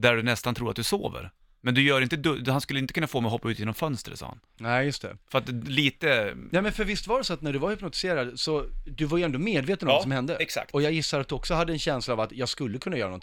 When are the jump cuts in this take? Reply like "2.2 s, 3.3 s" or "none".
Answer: none